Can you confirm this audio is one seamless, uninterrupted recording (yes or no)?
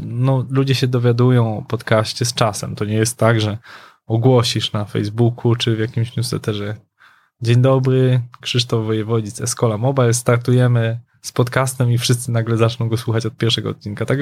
yes